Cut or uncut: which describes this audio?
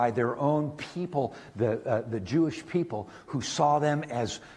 uncut